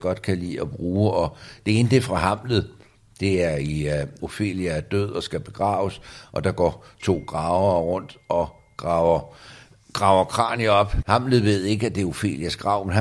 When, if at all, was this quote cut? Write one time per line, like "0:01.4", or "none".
0:04.2
0:11.0